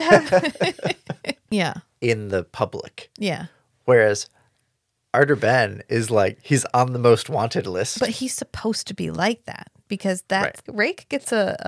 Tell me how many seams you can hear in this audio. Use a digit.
2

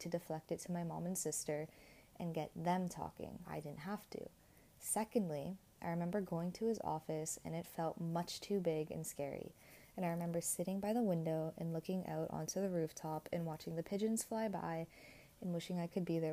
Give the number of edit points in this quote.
1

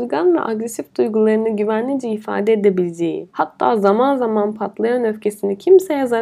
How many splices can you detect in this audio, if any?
1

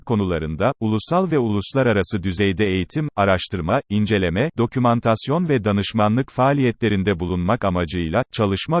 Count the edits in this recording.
1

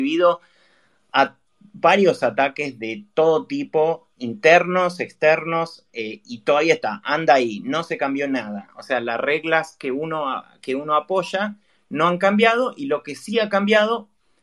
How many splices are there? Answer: 0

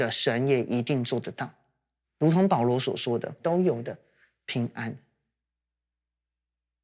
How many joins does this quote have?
2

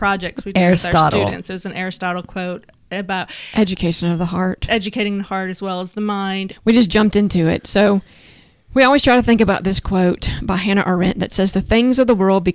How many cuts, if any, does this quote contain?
1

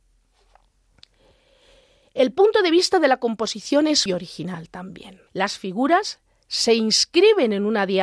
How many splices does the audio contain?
2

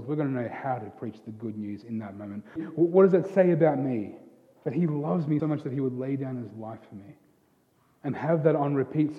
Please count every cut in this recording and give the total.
2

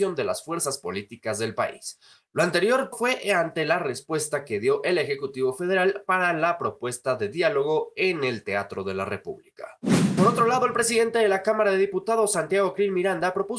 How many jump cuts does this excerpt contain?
2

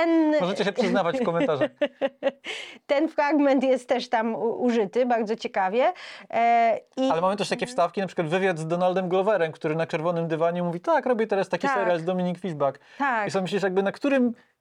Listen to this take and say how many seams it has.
0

